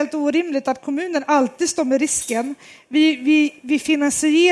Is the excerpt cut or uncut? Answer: uncut